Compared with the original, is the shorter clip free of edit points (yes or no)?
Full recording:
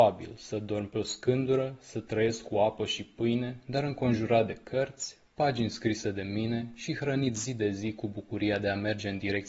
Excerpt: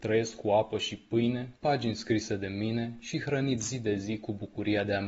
no